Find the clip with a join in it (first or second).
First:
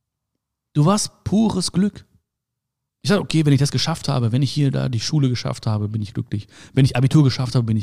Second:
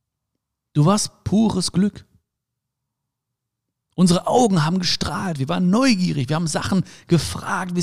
first